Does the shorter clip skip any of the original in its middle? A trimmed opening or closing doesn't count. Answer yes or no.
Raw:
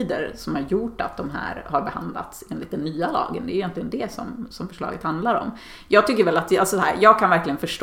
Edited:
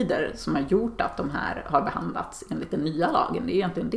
no